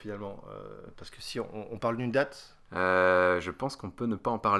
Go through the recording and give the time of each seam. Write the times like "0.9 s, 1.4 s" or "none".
2.7 s